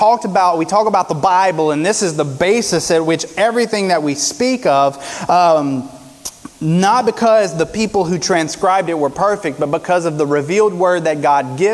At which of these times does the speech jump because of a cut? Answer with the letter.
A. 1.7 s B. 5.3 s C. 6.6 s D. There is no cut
D